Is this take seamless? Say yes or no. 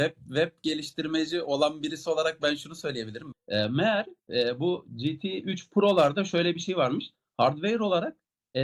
no